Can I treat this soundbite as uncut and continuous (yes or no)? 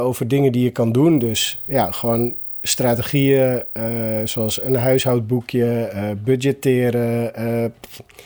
yes